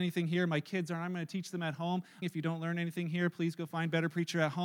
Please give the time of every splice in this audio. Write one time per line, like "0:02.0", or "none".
0:02.2